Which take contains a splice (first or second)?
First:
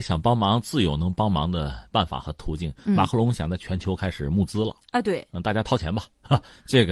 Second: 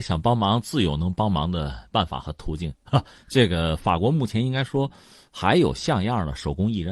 second